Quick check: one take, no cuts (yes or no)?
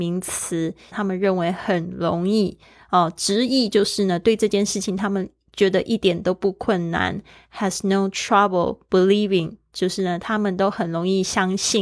no